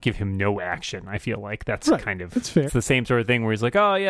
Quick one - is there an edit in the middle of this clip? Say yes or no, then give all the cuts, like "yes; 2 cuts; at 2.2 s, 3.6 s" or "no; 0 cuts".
yes; 1 cut; at 2.7 s